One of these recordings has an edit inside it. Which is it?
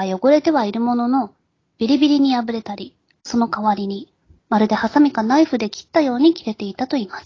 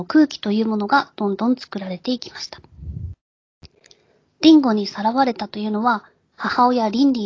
first; 2 cuts; at 3.1 s, 4.4 s

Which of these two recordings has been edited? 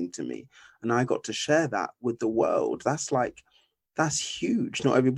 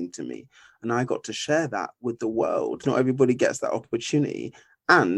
second; 1 cut; at 2.8 s

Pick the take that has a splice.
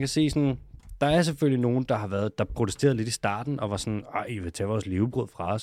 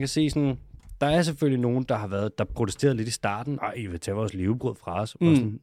second; 1 cut; at 3.6 s

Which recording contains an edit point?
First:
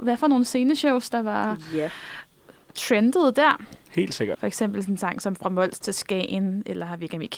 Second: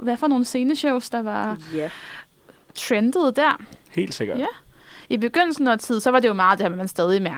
first; 1 cut; at 4.3 s

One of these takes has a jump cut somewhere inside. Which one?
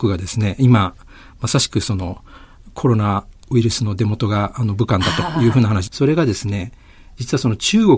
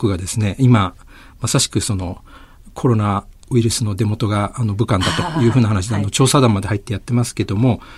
first; 1 cut; at 5.9 s

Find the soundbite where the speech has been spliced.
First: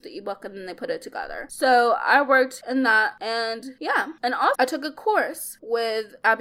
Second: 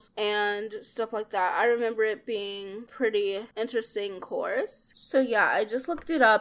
first; 1 cut; at 4.5 s

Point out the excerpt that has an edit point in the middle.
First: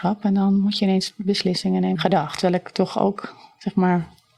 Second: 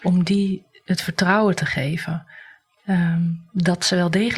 first; 1 cut; at 2.0 s

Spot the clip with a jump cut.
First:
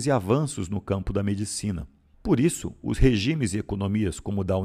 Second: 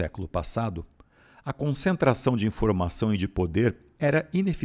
first; 1 cut; at 2.1 s

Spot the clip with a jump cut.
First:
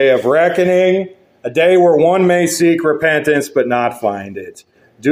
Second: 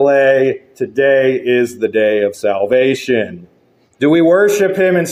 second; 1 cut; at 3.9 s

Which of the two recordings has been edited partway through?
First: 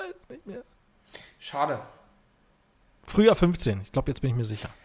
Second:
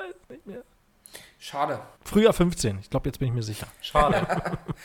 second; 1 cut; at 2.0 s

